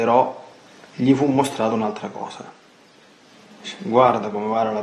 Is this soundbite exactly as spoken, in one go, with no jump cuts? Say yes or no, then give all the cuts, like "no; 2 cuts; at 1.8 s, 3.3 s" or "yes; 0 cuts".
yes; 0 cuts